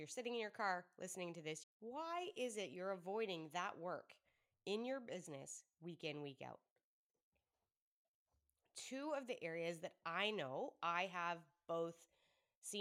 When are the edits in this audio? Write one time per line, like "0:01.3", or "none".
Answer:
0:01.6